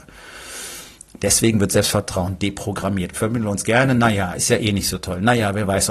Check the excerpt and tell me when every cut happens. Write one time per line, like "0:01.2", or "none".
0:03.1